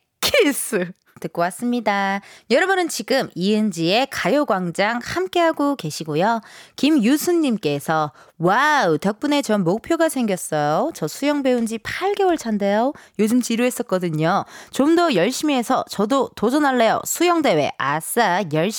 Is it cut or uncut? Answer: cut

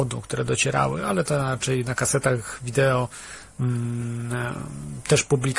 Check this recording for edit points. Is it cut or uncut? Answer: uncut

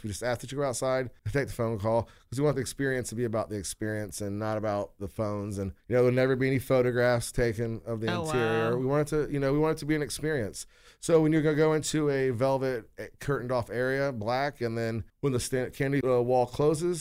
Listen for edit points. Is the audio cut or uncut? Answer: uncut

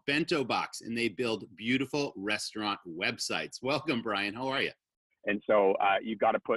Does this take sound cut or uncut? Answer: cut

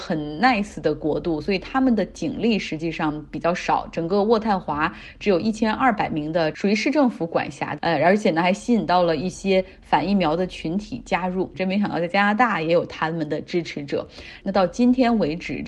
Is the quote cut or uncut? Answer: cut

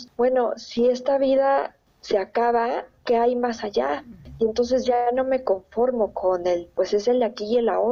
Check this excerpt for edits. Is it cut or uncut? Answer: uncut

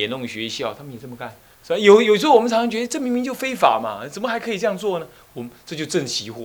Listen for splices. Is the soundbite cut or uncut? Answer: cut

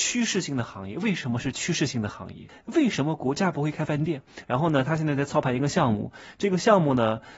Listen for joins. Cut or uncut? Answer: cut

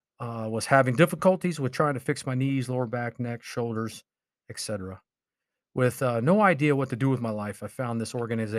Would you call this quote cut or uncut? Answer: uncut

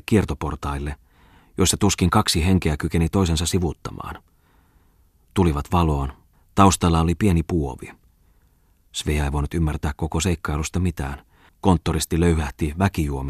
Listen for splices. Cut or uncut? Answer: cut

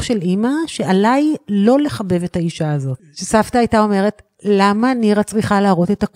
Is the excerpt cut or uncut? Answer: cut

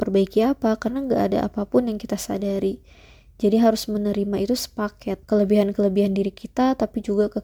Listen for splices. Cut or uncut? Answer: cut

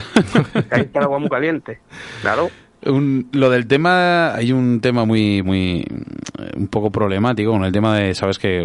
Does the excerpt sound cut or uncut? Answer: cut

